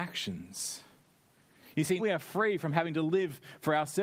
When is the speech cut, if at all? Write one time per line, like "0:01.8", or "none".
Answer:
0:02.0